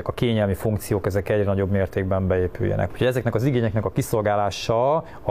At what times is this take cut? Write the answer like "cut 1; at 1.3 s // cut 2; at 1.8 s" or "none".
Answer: cut 1; at 2.9 s

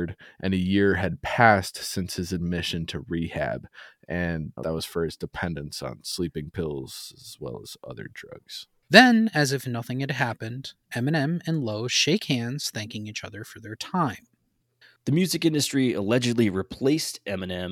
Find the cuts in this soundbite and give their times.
cut 1; at 4.6 s // cut 2; at 8.9 s // cut 3; at 15.0 s

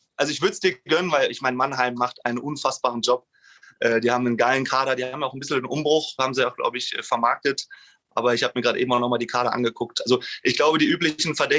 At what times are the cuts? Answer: none

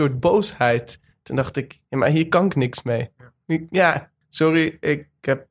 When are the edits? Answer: cut 1; at 1.8 s // cut 2; at 4.2 s

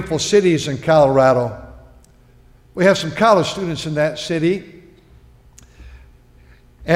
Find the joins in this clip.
none

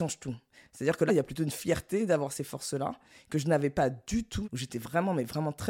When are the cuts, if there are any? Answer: cut 1; at 1.1 s // cut 2; at 4.4 s

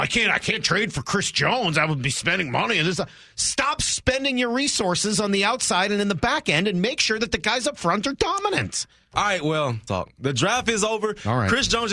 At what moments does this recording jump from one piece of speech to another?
cut 1; at 9.9 s

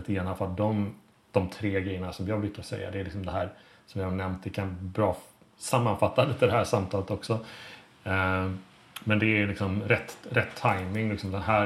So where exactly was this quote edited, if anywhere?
none

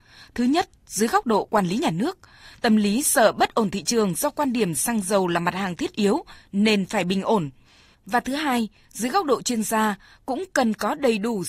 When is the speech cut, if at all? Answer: cut 1; at 7.9 s

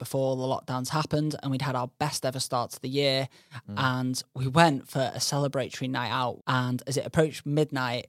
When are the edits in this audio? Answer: cut 1; at 6.4 s

